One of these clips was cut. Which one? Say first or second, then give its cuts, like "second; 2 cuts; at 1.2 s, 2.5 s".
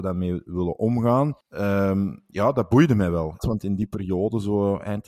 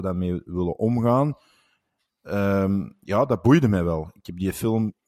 first; 2 cuts; at 1.4 s, 3.4 s